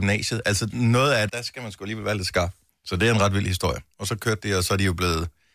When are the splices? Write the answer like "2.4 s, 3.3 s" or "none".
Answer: 1.3 s, 2.7 s